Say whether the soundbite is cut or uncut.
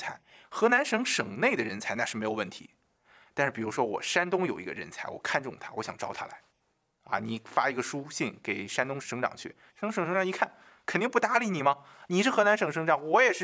cut